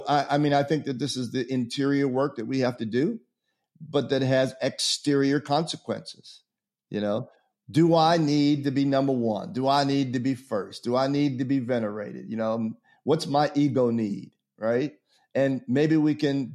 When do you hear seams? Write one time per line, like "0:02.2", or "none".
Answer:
none